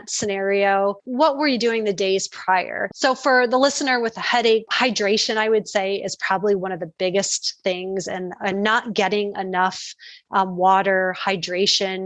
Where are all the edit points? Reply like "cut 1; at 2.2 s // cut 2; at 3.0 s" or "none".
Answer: cut 1; at 1.0 s // cut 2; at 2.9 s